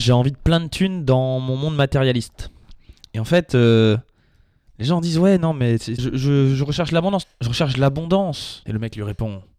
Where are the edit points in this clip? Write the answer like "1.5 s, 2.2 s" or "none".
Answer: 6.0 s, 7.2 s, 8.7 s

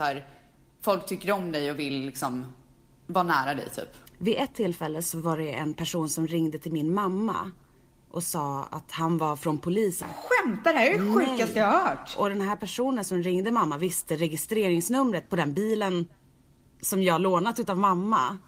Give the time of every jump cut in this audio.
4.1 s, 10.0 s

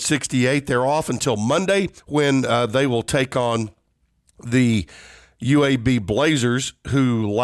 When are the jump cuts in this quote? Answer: 2.0 s

